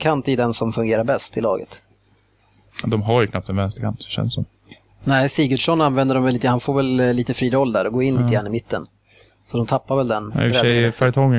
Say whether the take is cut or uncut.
uncut